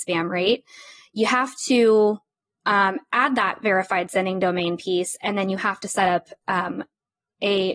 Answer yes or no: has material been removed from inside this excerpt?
no